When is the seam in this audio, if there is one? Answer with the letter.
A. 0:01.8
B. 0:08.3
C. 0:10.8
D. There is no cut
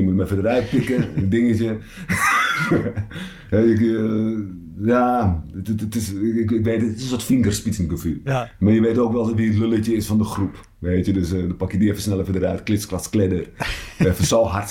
D